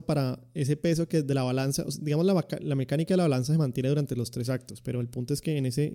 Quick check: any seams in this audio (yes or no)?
no